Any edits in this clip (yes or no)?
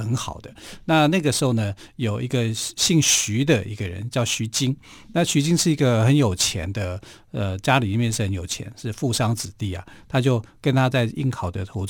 no